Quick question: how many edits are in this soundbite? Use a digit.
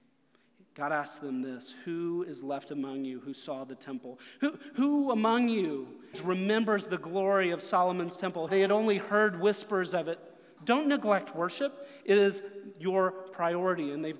3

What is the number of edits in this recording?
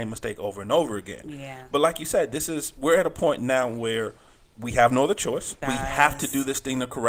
1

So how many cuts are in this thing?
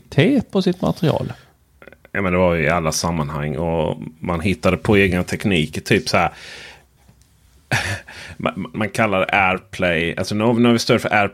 1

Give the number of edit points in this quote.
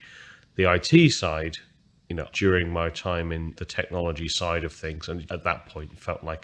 3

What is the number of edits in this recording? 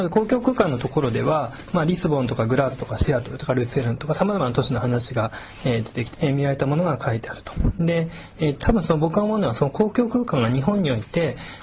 2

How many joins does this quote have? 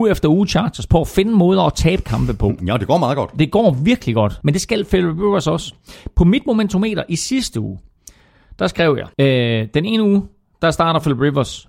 2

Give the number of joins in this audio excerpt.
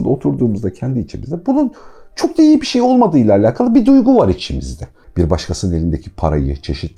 1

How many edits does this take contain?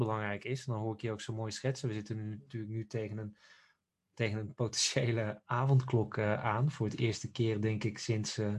0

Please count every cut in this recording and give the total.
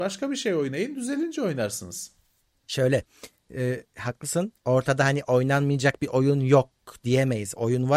0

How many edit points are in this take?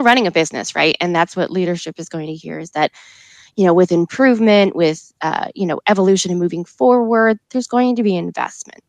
0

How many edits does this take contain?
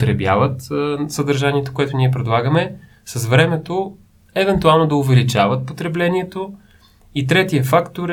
0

